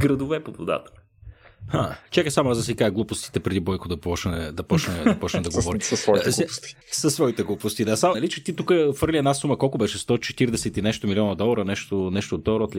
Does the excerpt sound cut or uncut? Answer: cut